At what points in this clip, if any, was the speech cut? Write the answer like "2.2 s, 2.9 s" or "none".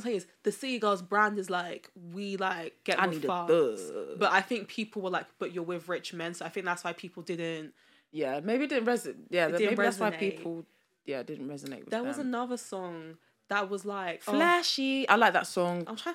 none